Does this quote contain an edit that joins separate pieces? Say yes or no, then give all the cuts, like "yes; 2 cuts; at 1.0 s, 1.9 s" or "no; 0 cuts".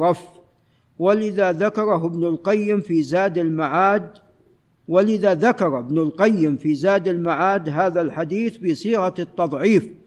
no; 0 cuts